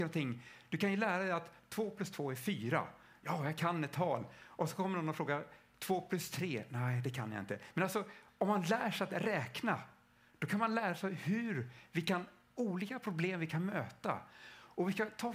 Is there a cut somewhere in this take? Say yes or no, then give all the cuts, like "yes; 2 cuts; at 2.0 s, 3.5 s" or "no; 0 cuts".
no; 0 cuts